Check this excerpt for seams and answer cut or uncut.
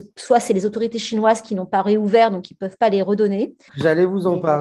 cut